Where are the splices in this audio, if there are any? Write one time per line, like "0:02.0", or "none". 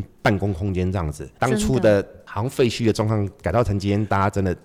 0:01.4